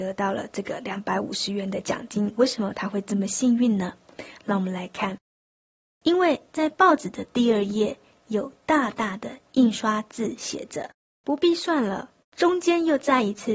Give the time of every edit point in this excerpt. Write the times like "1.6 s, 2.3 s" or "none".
12.2 s